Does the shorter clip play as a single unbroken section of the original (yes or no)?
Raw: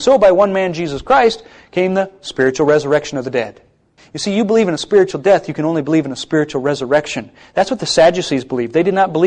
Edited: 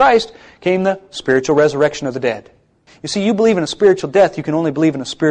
yes